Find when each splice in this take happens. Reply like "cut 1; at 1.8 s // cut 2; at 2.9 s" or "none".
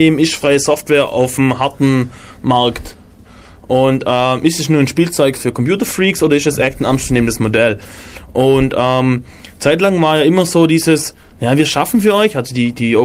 cut 1; at 5.3 s

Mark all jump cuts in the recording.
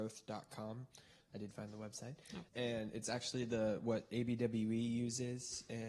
cut 1; at 2.5 s

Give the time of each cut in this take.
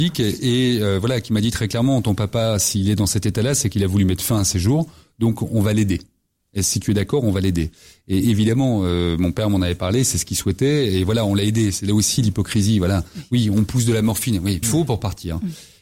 cut 1; at 14.6 s

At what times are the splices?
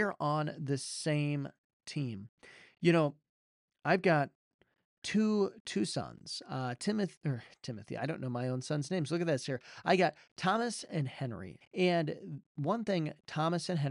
cut 1; at 11.6 s

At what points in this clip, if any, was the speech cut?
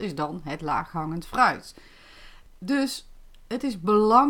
cut 1; at 2.5 s

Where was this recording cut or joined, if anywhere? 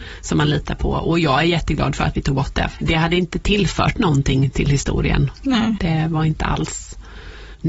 cut 1; at 2.8 s // cut 2; at 5.8 s

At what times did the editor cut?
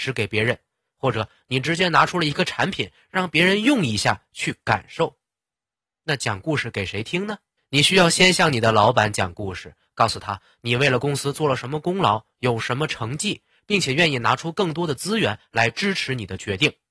cut 1; at 7.6 s // cut 2; at 13.6 s

